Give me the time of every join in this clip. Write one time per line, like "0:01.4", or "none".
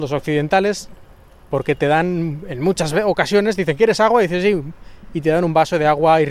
none